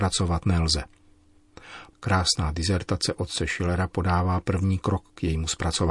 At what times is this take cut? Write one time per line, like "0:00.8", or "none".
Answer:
0:01.9